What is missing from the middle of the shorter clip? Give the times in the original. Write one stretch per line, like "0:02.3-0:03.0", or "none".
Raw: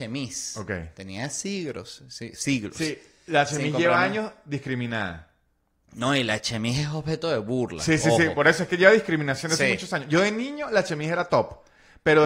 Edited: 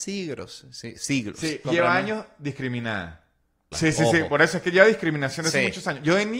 0:03.0-0:03.7
0:05.8-0:07.8

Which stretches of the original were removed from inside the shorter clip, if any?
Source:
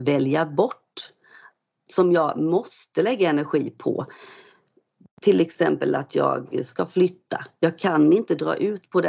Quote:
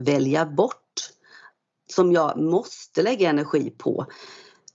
none

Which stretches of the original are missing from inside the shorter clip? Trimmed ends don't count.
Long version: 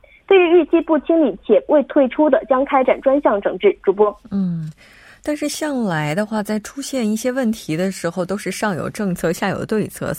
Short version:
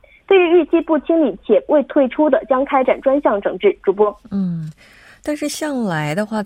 none

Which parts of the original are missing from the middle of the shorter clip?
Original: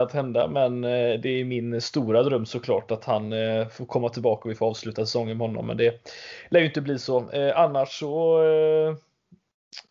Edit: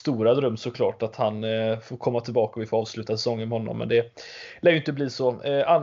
none

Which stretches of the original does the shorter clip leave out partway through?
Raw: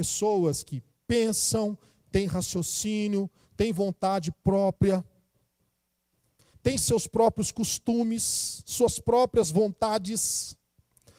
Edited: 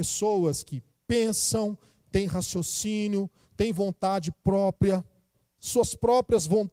0:05.6-0:08.6

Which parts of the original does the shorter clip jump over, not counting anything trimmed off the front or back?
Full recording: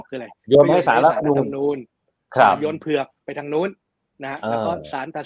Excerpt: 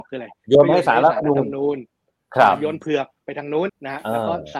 0:03.7-0:04.1

